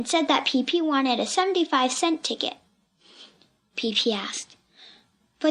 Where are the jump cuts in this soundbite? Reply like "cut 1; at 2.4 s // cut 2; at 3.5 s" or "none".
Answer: cut 1; at 3.6 s